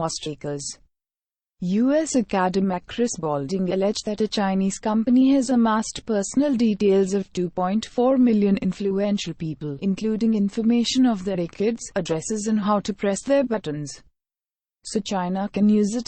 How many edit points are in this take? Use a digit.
0